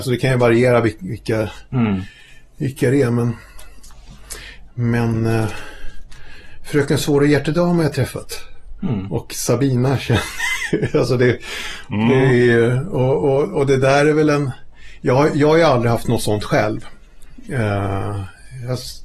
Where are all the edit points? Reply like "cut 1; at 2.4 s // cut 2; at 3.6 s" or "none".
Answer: none